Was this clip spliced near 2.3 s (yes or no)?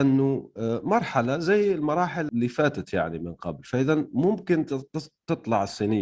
yes